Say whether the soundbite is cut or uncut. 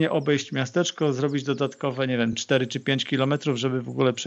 uncut